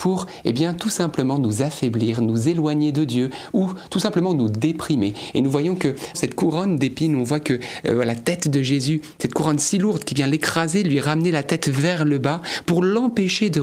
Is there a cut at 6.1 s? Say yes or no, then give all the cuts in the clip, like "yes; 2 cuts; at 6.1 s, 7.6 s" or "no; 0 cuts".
yes; 1 cut; at 6.1 s